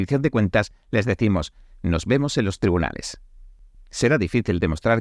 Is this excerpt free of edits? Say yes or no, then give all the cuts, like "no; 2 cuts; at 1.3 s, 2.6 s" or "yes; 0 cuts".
no; 1 cut; at 3.7 s